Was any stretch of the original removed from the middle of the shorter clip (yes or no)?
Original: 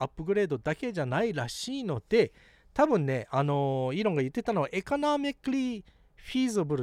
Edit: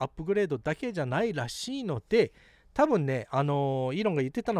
no